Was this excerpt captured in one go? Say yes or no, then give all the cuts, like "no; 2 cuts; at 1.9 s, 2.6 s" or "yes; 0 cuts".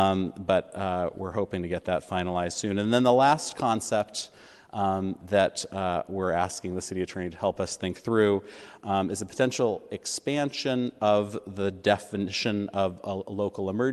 yes; 0 cuts